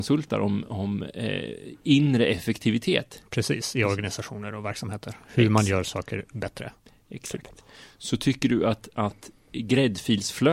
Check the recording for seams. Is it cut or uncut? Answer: uncut